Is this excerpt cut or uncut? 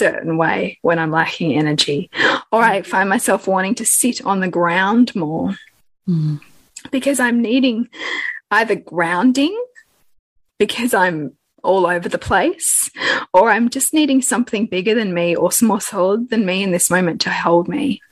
uncut